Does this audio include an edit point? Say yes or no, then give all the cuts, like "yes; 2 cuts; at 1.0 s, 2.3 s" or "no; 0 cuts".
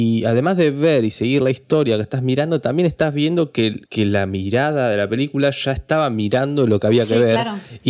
yes; 1 cut; at 3.9 s